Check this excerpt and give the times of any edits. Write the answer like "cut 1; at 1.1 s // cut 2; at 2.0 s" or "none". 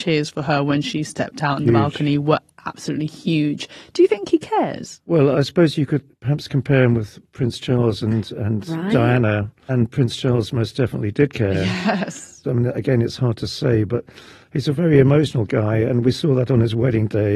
cut 1; at 12.4 s